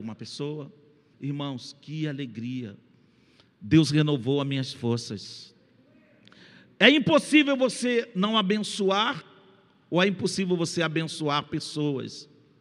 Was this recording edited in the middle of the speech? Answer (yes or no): yes